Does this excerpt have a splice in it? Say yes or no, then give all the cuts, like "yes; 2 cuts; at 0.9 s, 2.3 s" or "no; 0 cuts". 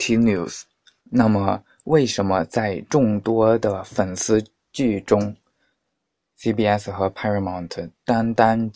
yes; 1 cut; at 1.0 s